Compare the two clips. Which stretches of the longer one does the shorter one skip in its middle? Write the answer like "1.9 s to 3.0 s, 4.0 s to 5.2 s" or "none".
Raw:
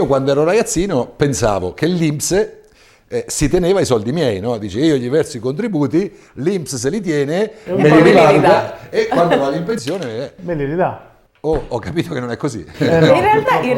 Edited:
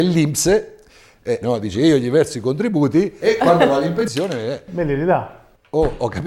3.3 s to 4.4 s, 6.2 s to 8.9 s

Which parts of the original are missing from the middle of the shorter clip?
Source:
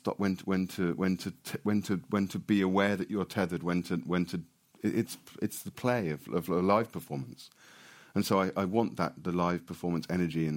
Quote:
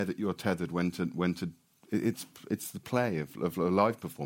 none

